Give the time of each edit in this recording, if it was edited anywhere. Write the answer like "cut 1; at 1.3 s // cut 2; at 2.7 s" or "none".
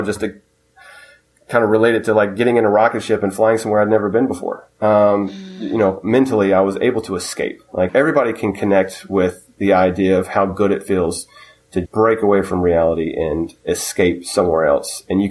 cut 1; at 7.9 s // cut 2; at 11.8 s

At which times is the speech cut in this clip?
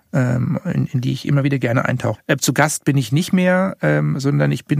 cut 1; at 2.1 s

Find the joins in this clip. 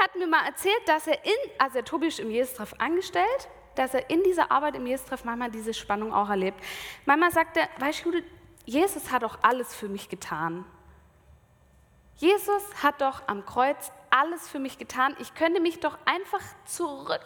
cut 1; at 3.8 s

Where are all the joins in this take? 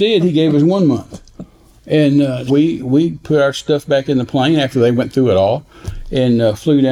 cut 1; at 2.5 s

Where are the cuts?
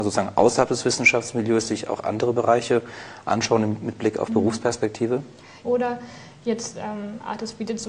cut 1; at 5.6 s

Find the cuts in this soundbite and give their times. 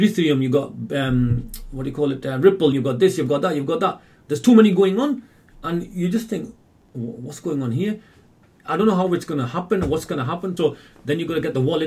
cut 1; at 2.7 s // cut 2; at 10.6 s

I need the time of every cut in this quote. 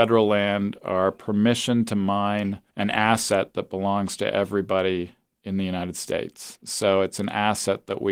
cut 1; at 2.7 s

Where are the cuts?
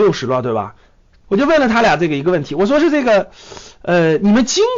cut 1; at 1.2 s

